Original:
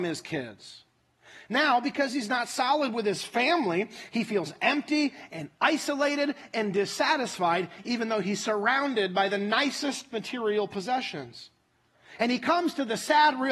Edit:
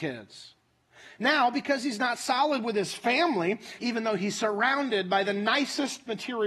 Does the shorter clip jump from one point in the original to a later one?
yes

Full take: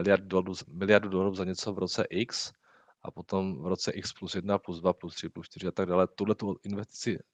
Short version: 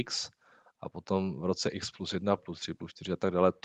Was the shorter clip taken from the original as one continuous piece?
no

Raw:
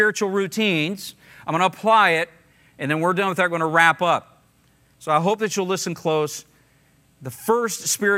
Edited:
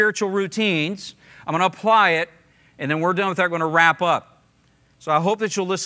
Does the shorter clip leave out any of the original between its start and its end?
no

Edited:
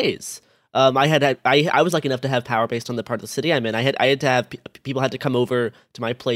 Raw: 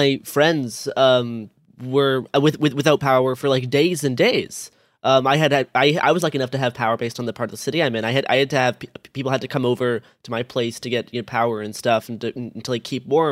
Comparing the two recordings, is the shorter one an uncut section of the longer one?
yes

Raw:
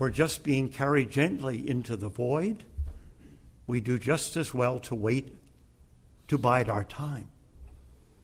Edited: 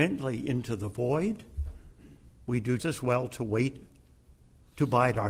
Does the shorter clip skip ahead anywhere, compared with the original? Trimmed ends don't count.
yes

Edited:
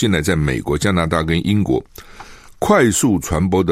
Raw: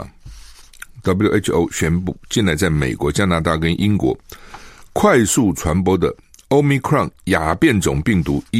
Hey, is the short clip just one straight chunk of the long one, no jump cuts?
yes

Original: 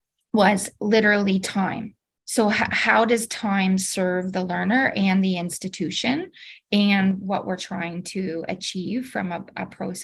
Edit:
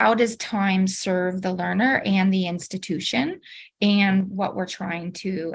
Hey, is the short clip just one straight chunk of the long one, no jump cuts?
yes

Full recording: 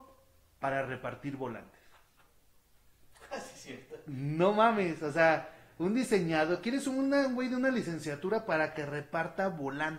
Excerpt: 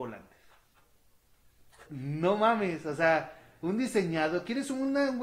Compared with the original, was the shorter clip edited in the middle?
yes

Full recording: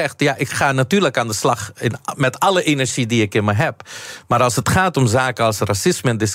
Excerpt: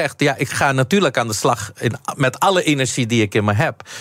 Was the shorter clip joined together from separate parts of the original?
no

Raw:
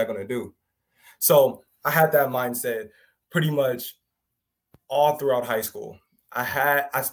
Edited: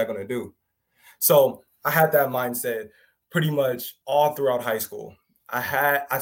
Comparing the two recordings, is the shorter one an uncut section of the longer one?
no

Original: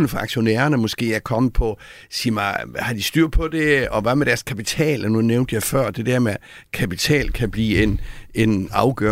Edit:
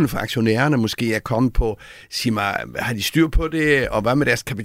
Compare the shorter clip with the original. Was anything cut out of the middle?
no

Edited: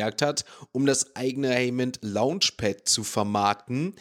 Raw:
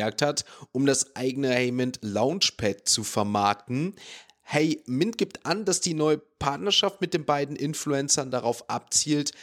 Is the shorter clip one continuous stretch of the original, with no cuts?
yes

